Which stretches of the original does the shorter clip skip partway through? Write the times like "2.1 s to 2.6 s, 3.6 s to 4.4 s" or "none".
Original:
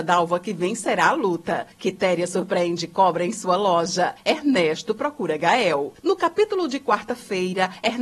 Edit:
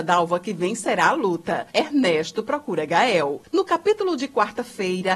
1.7 s to 4.2 s